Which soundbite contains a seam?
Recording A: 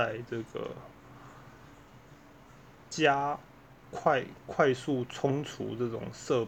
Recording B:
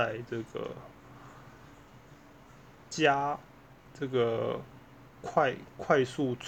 A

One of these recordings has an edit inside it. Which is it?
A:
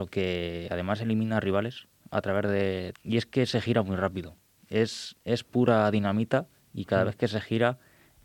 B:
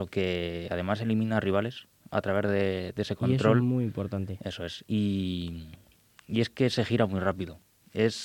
A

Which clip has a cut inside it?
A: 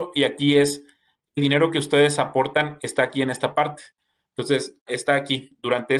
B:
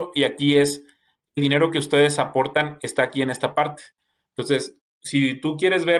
A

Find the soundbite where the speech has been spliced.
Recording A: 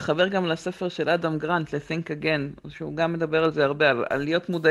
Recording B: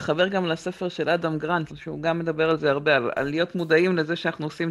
B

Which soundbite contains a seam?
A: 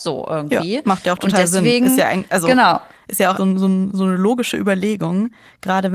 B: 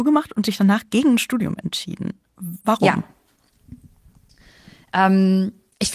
A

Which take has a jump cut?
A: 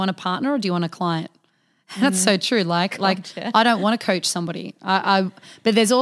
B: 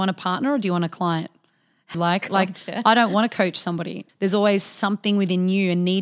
B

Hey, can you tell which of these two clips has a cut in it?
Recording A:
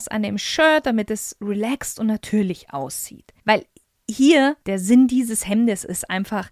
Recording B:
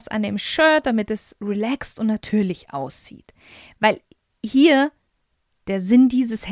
A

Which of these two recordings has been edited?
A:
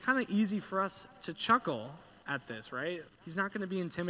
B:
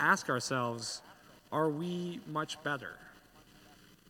A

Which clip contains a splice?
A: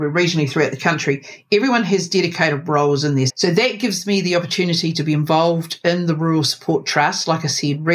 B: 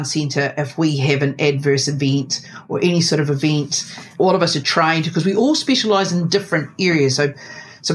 A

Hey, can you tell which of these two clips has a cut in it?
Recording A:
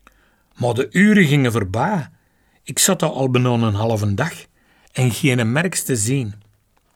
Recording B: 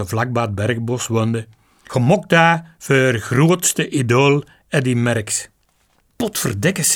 B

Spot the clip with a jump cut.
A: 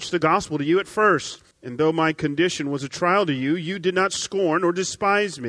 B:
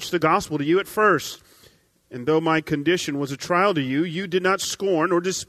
A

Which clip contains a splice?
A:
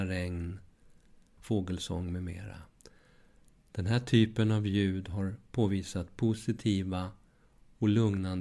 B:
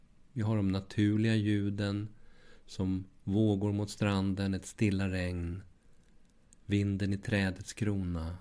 A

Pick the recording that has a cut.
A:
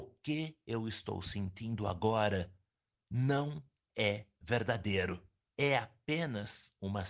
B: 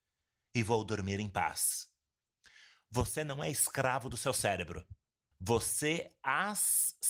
B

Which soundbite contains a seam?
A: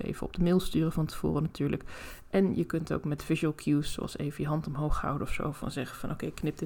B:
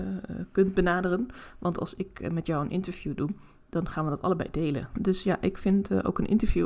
B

